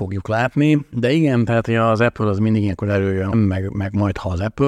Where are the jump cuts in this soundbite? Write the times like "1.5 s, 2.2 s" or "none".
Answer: 0.9 s, 3.3 s